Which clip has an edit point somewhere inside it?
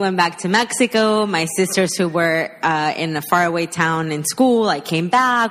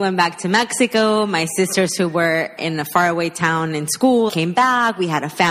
second; 2 cuts; at 2.6 s, 4.3 s

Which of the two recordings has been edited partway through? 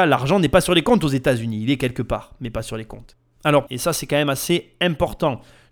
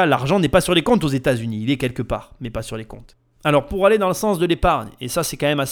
first; 1 cut; at 3.7 s

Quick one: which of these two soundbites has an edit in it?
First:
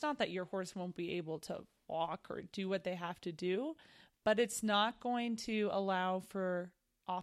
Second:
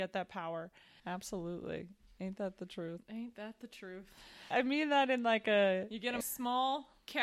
second; 3 cuts; at 1.0 s, 4.5 s, 6.2 s

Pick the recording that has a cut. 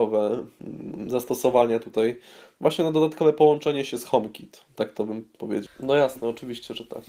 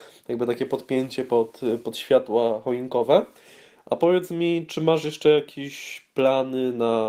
first; 1 cut; at 5.7 s

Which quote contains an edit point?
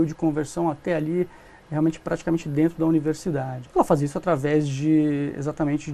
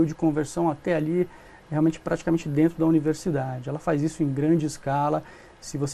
first; 1 cut; at 3.6 s

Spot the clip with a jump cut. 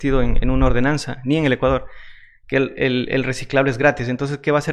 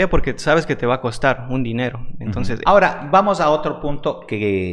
second; 1 cut; at 2.7 s

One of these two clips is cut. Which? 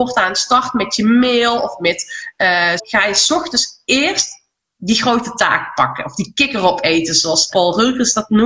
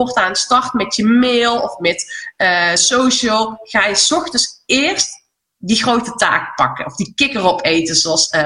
first; 2 cuts; at 2.8 s, 7.5 s

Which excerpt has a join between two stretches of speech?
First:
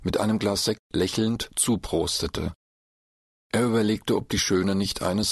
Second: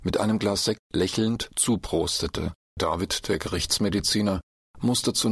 second; 1 cut; at 2.8 s

